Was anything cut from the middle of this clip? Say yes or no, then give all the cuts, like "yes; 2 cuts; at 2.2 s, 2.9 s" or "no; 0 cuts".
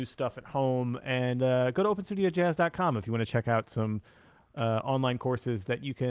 no; 0 cuts